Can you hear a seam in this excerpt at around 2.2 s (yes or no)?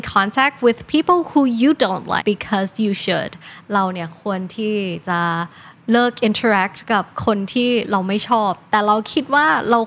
yes